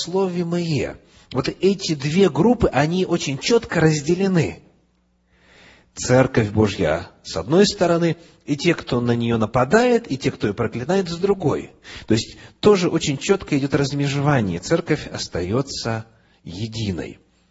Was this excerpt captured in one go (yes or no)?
yes